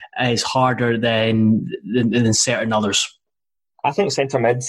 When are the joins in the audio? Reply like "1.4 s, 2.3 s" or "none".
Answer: none